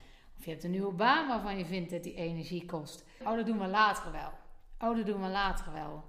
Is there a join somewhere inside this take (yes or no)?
yes